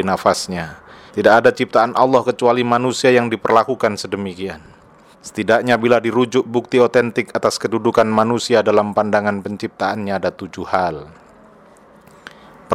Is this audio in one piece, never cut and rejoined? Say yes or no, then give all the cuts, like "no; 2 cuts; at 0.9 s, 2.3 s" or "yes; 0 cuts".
no; 2 cuts; at 1.1 s, 5.1 s